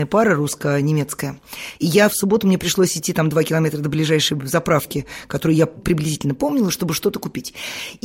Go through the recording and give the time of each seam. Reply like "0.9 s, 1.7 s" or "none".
1.7 s, 5.8 s